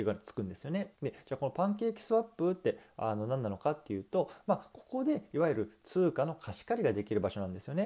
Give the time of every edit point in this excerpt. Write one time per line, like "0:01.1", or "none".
0:00.9